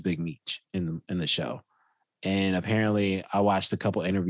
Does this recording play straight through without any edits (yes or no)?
yes